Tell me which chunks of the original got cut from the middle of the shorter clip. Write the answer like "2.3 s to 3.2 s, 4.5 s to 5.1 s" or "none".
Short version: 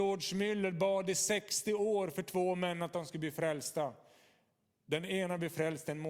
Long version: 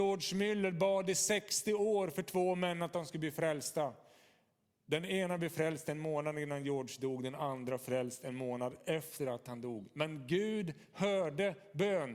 none